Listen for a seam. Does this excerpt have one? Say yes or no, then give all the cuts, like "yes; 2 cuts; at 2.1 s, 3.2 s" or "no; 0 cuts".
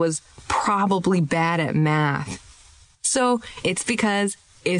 yes; 1 cut; at 3.6 s